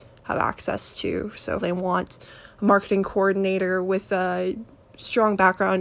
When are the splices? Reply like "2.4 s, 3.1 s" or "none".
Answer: 1.6 s